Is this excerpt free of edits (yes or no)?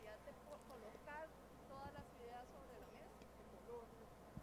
yes